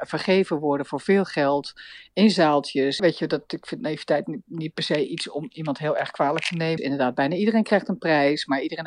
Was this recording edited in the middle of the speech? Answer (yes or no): yes